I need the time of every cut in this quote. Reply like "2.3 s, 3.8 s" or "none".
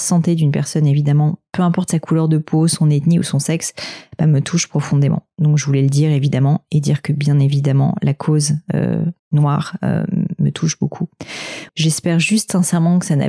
9.2 s, 11.7 s